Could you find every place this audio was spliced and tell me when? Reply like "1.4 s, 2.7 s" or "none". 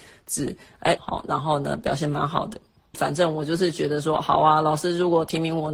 1.0 s, 2.9 s

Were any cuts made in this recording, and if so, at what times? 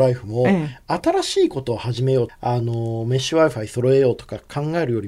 2.3 s

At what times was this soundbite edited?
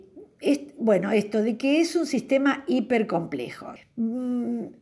3.8 s

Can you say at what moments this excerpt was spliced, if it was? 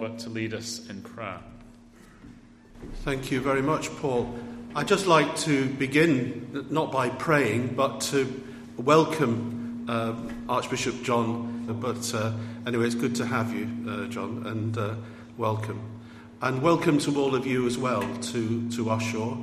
11.7 s

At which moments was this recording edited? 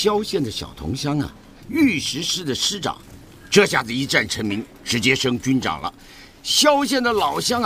1.6 s

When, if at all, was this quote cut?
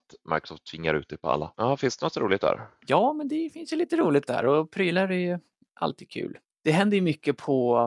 1.5 s

